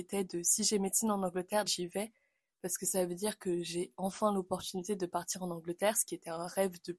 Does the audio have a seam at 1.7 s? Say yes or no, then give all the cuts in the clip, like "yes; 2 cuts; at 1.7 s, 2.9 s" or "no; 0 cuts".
yes; 1 cut; at 1.7 s